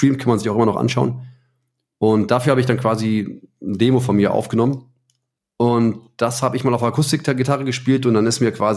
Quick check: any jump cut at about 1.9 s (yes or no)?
no